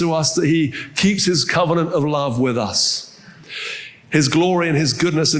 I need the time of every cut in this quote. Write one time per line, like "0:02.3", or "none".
none